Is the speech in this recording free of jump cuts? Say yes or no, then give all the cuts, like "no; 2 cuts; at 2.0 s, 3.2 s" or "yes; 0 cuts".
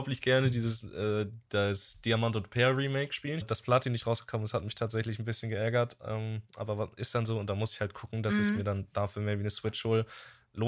no; 1 cut; at 3.4 s